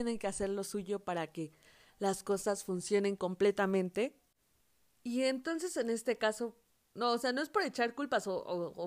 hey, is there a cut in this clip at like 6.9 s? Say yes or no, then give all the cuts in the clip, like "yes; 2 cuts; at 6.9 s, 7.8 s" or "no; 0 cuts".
yes; 1 cut; at 6.9 s